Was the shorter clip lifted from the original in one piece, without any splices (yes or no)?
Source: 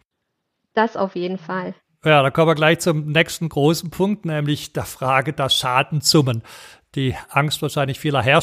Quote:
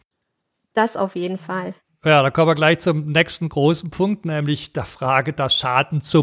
yes